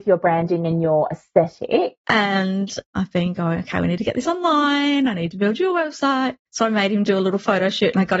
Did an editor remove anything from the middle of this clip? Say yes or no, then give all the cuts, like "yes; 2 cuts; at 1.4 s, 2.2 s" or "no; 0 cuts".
yes; 1 cut; at 2.0 s